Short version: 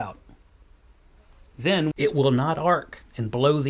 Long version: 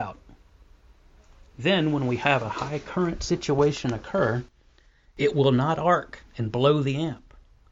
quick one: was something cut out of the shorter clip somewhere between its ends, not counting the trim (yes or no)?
yes